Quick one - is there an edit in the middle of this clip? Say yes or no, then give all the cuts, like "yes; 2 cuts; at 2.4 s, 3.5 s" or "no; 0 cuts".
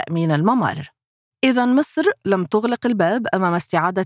no; 0 cuts